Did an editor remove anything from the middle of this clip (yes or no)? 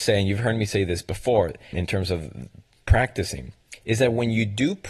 yes